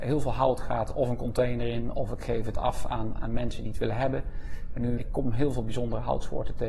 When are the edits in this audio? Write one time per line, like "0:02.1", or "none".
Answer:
0:03.2
0:05.0